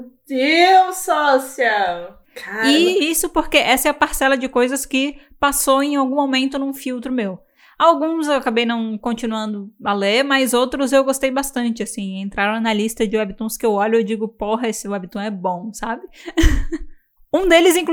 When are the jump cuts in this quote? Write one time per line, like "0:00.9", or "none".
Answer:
0:02.2